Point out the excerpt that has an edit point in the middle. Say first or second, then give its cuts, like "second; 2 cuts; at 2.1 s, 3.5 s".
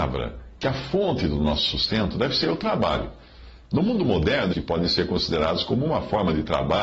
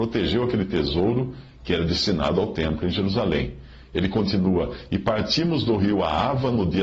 first; 1 cut; at 4.5 s